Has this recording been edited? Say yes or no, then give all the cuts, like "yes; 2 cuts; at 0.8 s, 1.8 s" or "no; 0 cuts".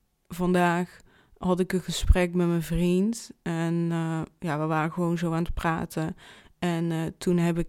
no; 0 cuts